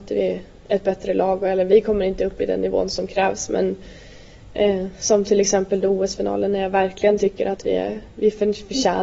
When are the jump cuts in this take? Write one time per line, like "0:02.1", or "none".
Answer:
none

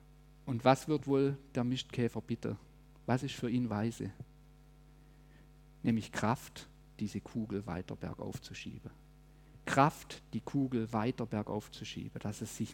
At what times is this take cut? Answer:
none

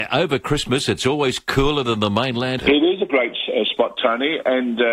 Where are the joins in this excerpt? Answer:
0:02.6

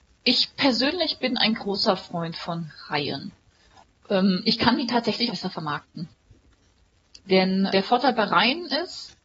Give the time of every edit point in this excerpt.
0:05.3
0:07.7

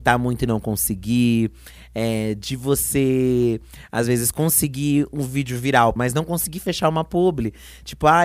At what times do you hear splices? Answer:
0:06.0

